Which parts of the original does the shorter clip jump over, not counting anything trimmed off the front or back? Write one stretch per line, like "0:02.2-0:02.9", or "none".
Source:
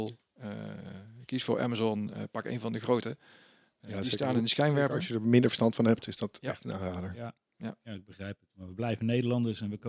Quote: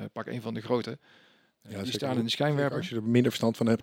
none